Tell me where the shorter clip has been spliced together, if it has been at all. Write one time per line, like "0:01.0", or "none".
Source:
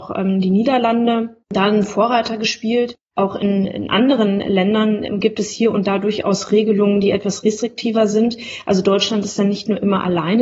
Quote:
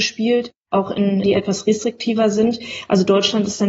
0:01.2